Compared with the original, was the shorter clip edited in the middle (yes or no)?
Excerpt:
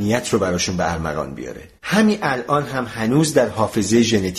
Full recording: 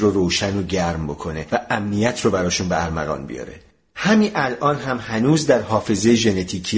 yes